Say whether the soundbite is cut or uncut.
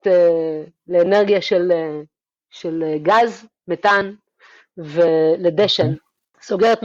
uncut